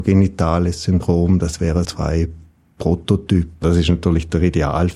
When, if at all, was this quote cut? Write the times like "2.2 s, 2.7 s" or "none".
1.8 s, 3.6 s

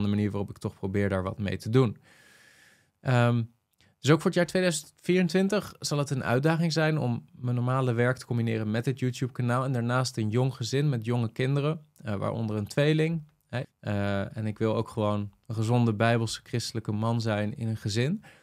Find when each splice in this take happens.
13.6 s

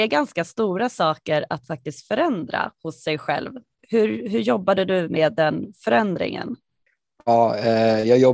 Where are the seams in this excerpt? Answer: none

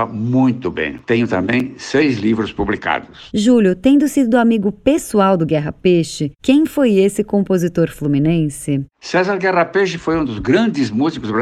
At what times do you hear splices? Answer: 1.0 s

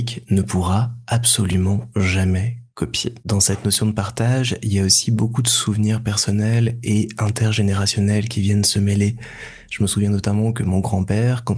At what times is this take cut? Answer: none

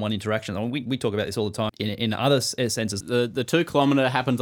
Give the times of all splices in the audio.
1.7 s, 3.0 s

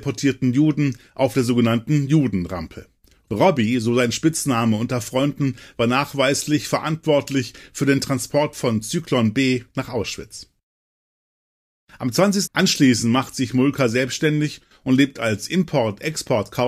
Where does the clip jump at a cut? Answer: 12.5 s

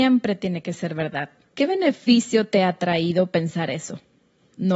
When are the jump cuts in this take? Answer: 1.5 s

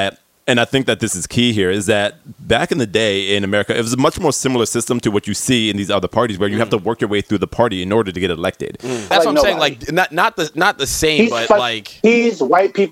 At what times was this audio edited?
9.1 s

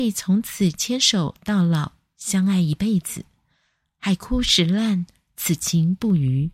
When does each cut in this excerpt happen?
none

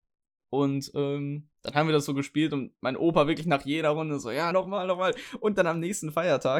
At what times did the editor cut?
1.5 s, 4.5 s

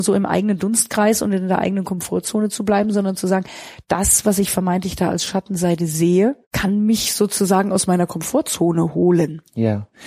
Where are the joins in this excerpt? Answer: 6.4 s

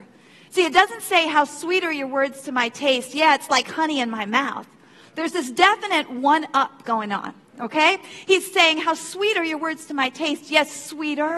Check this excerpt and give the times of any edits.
none

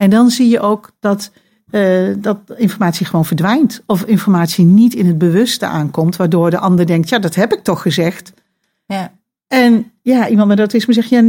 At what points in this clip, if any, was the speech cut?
none

